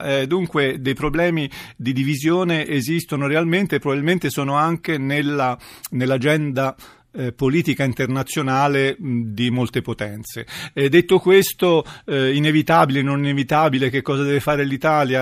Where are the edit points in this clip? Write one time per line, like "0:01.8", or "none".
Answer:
none